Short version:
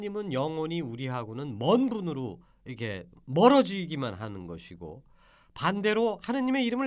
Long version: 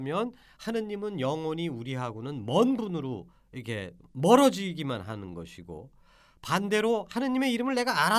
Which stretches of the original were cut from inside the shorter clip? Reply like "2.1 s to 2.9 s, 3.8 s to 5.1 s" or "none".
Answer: none